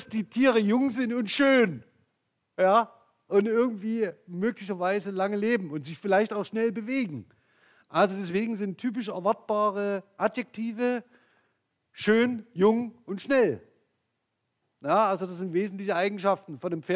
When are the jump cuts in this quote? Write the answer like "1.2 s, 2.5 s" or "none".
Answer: none